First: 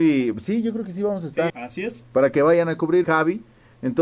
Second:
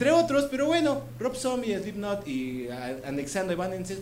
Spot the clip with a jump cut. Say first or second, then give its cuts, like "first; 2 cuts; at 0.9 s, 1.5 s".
first; 2 cuts; at 1.5 s, 3.0 s